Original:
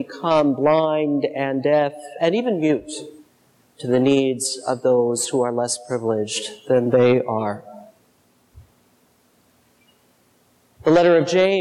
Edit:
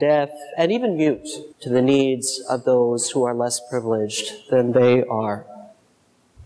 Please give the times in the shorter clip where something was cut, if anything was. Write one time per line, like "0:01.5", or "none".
0:01.5